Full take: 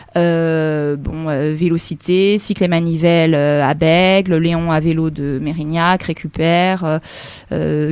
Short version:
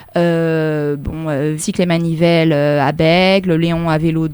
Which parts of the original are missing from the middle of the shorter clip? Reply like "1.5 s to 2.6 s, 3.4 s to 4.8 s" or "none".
1.6 s to 2.4 s